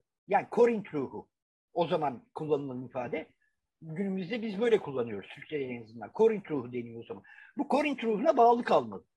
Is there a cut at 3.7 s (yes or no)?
yes